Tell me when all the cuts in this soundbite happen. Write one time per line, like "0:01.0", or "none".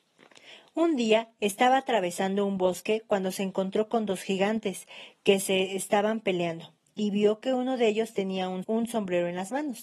0:08.6